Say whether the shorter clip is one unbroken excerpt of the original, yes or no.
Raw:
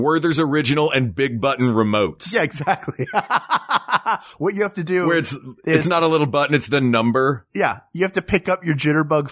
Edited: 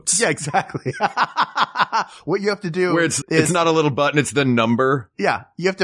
no